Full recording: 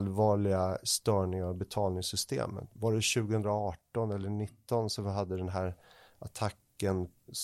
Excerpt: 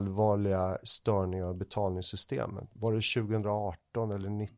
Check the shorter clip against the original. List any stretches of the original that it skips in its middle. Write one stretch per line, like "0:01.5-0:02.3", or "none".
none

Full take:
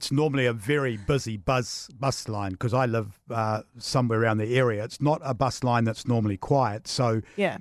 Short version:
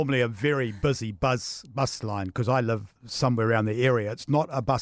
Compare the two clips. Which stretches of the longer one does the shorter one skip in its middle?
0:03.2-0:03.7

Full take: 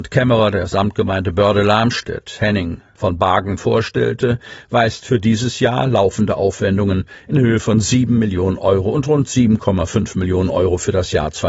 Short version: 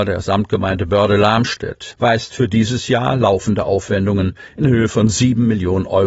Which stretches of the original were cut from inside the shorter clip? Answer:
0:02.4-0:04.6

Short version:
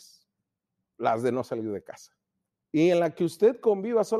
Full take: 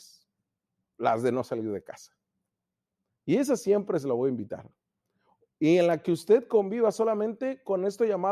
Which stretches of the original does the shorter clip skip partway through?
0:02.6-0:05.5

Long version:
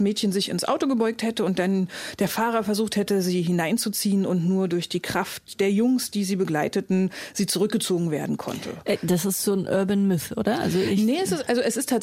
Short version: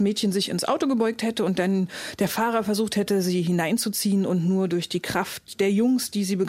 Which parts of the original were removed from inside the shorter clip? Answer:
none

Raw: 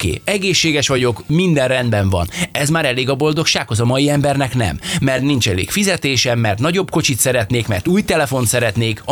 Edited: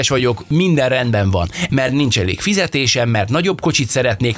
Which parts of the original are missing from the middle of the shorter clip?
0:02.5-0:05.0

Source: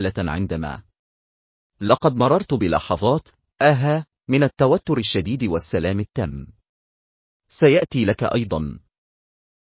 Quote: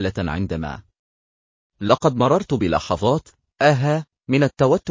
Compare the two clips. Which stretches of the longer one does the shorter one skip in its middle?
none

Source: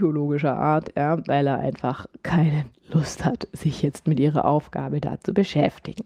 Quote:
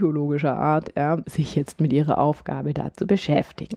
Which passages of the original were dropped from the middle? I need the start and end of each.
0:01.2-0:03.5

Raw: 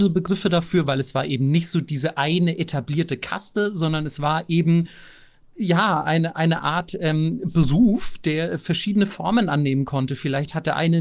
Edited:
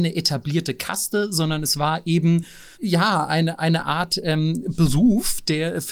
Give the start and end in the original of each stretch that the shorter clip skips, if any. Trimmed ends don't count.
0:05.2-0:05.5

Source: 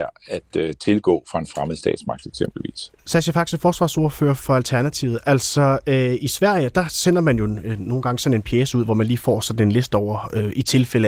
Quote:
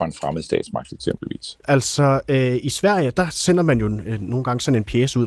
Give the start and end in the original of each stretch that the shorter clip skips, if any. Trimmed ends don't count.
0:03.0-0:05.2

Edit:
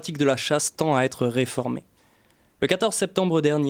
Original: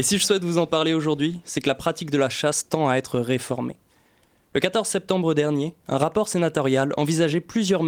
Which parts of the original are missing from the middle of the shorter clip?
none

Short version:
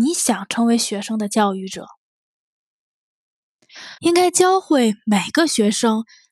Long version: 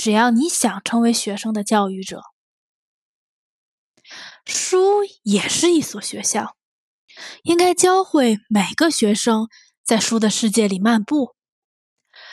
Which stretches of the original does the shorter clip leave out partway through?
0:04.3-0:07.4

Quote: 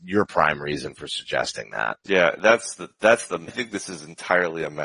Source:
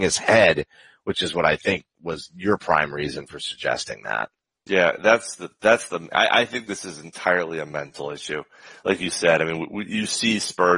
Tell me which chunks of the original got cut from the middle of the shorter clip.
0:04.3-0:04.6
0:06.1-0:06.4

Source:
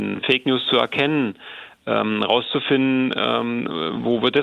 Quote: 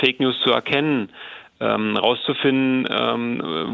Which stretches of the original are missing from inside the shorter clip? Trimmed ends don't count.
none

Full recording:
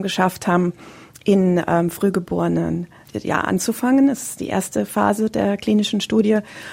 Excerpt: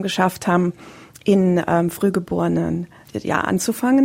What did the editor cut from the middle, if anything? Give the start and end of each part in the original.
none

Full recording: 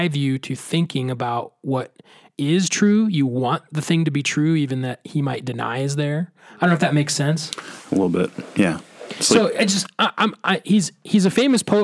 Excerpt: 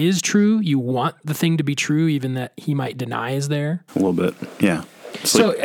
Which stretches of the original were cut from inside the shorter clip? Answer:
0:06.4-0:07.8

